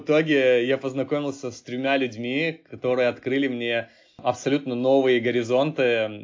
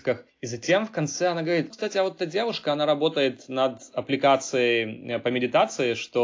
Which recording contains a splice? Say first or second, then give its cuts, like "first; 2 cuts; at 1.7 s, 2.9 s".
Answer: second; 1 cut; at 1.7 s